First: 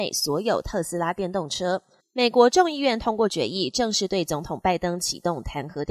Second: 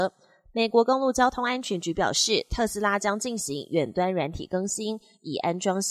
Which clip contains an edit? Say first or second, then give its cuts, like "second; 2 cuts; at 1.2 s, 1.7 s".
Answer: first; 1 cut; at 2.0 s